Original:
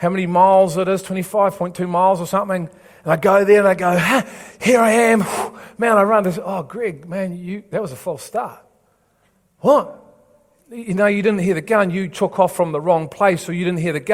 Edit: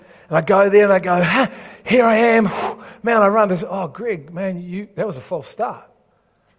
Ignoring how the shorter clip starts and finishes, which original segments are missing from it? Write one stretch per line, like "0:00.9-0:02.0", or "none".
none